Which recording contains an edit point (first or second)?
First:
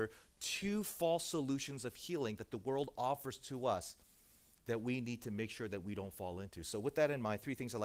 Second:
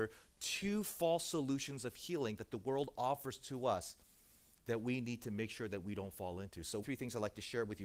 second